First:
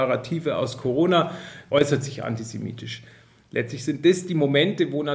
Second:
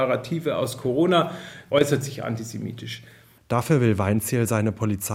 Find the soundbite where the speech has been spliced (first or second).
second